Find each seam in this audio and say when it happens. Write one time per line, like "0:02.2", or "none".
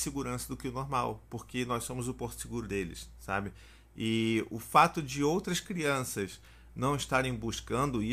none